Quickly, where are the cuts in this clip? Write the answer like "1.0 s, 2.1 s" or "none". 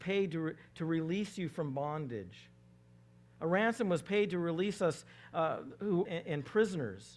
6.0 s